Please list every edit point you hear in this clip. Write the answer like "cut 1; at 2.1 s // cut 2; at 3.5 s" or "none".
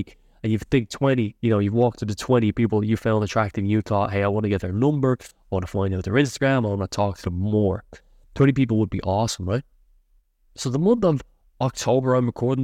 cut 1; at 10.5 s